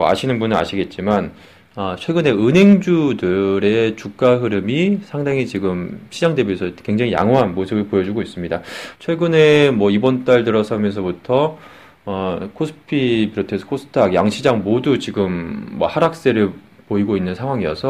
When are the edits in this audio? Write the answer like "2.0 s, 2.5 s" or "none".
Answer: 8.9 s